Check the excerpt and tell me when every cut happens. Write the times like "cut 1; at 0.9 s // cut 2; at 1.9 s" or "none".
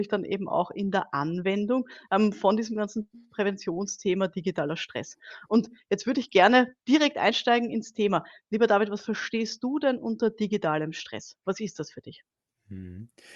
none